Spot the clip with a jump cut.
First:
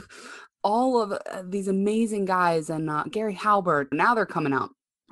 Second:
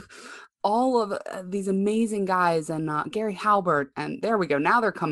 first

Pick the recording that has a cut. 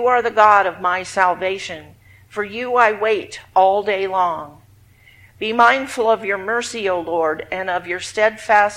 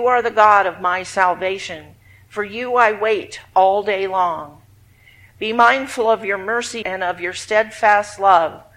second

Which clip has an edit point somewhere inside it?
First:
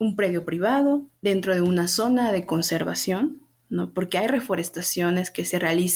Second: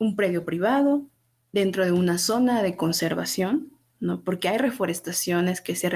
first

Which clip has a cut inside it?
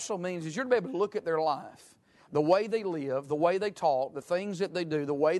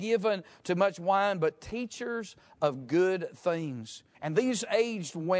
second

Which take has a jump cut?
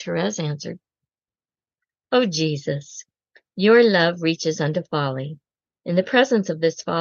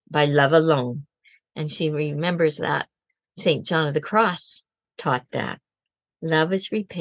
second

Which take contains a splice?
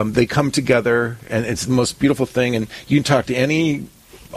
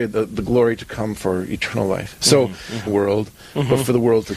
second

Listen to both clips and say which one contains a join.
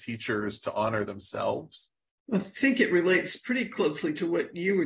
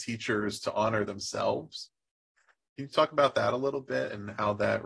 first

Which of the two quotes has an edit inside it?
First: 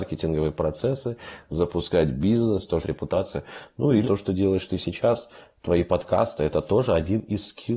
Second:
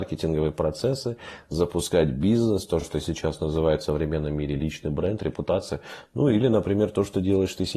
first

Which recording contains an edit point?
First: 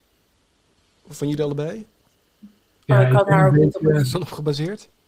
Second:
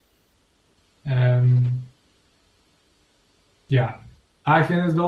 first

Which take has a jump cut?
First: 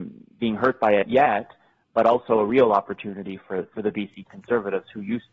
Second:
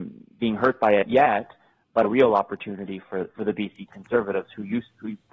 second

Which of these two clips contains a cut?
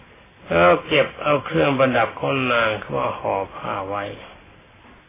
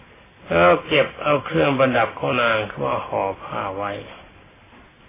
second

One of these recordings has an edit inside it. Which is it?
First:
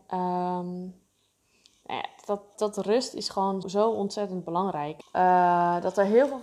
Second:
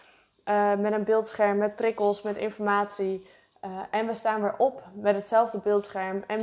first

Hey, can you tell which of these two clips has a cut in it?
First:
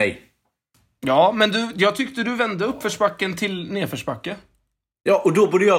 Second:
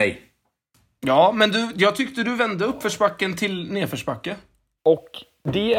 second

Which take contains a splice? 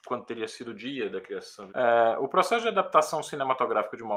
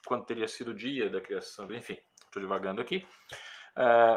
first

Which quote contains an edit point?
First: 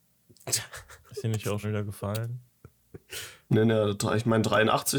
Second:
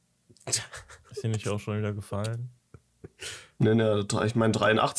first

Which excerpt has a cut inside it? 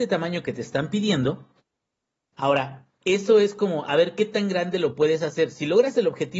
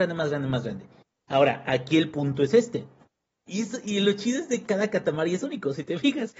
second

